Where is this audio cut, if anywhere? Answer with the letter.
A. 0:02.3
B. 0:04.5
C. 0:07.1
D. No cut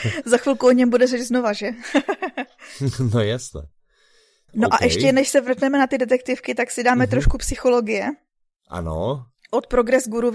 B